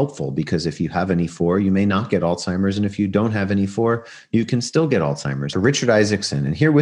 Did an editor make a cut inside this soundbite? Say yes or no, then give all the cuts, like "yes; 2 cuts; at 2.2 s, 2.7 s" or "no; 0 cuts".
yes; 1 cut; at 5.5 s